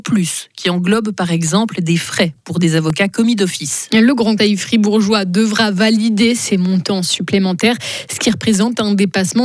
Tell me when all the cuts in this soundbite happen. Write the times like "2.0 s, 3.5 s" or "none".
4.4 s